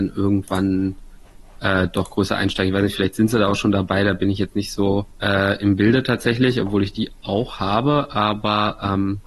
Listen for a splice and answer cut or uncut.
cut